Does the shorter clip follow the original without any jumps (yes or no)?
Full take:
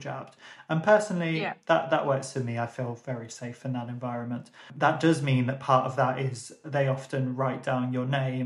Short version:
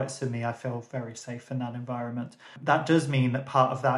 yes